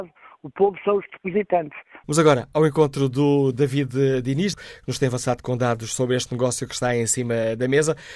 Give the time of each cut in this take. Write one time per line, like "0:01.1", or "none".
0:02.0
0:04.5